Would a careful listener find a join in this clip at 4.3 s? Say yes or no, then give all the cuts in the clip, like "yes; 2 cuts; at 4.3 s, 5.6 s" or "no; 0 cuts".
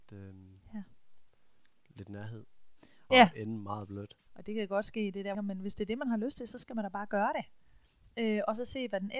yes; 3 cuts; at 3.1 s, 4.3 s, 5.3 s